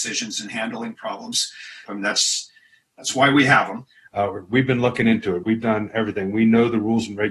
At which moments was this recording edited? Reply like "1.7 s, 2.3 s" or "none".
1.8 s, 4.1 s, 5.4 s

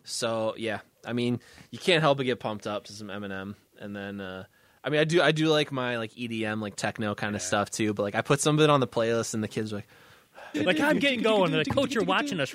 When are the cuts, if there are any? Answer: 10.5 s

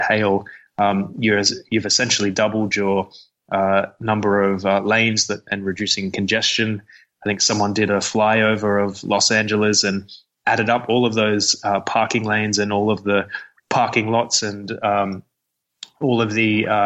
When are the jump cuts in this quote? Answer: 5.5 s

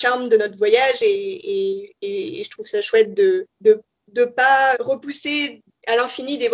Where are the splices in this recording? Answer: 3.5 s, 4.7 s

